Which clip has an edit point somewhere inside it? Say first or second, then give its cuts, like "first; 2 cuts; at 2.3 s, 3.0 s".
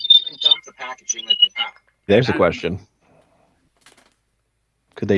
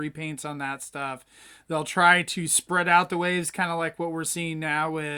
first; 1 cut; at 2.1 s